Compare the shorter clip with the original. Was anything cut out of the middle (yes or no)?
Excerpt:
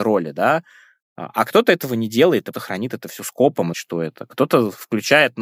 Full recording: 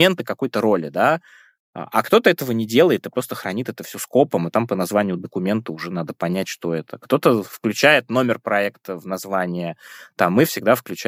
yes